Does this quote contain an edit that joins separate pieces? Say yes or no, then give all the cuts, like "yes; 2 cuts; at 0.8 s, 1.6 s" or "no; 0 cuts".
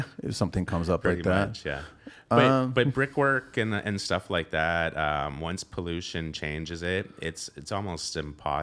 no; 0 cuts